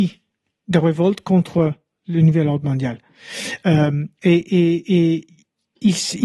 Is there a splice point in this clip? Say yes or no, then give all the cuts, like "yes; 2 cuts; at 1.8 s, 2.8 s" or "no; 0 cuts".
no; 0 cuts